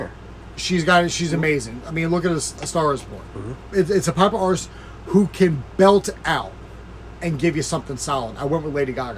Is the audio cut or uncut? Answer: cut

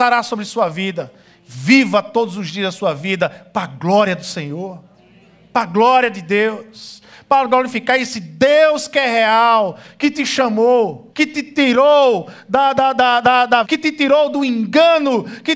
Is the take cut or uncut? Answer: cut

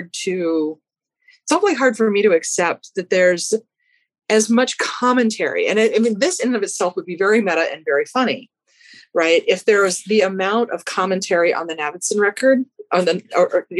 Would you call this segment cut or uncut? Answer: uncut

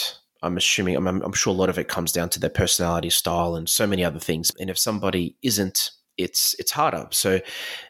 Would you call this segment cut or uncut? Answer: cut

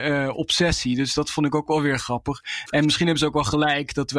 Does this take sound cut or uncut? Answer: uncut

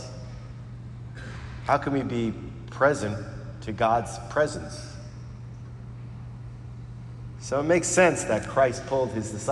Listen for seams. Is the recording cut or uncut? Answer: uncut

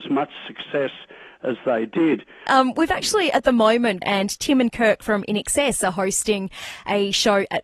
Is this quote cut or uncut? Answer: cut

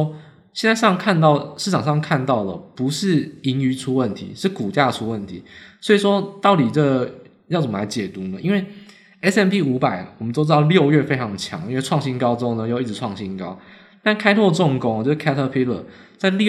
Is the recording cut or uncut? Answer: uncut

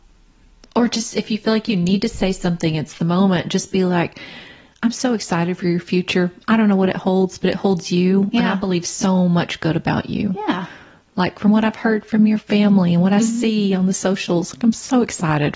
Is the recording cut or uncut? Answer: uncut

